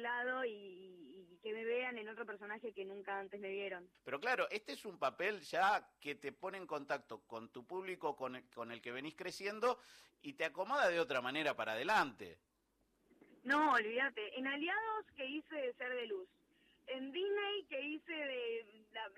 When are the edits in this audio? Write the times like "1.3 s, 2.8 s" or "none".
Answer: 3.9 s